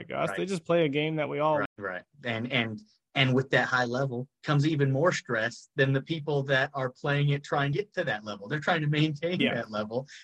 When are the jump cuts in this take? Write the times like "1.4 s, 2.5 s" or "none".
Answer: 1.7 s, 7.7 s